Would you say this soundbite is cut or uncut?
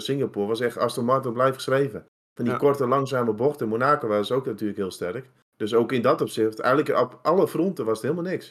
uncut